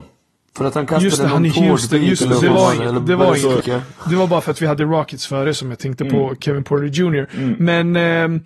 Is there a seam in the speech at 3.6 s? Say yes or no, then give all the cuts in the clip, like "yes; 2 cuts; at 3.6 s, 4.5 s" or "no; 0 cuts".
yes; 1 cut; at 3.6 s